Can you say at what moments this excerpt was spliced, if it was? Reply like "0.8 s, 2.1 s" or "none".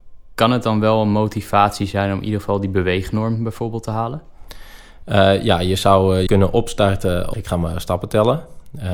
6.3 s, 7.3 s